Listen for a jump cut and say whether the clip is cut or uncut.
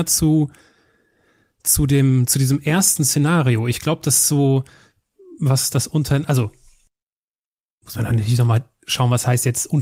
uncut